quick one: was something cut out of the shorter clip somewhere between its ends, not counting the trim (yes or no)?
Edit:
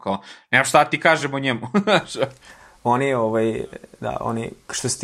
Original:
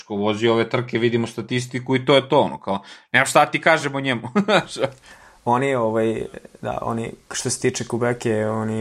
no